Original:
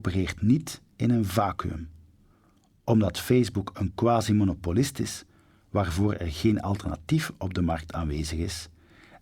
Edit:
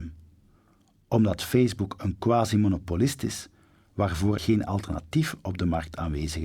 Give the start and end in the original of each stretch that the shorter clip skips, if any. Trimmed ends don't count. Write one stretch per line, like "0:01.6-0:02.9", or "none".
0:06.1-0:06.3